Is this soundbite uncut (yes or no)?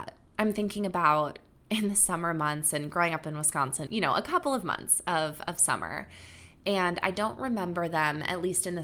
no